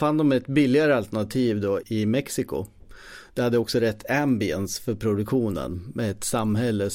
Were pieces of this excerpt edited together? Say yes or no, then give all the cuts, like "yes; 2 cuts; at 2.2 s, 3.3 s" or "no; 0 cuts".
yes; 1 cut; at 1.8 s